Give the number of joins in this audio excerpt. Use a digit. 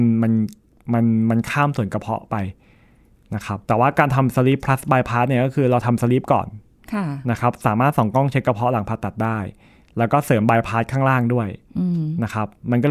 1